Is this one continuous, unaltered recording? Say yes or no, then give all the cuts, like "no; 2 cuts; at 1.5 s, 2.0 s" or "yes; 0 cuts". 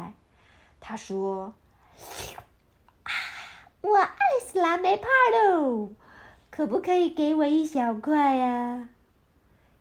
yes; 0 cuts